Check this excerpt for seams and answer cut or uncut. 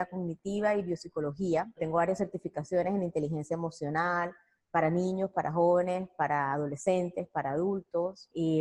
uncut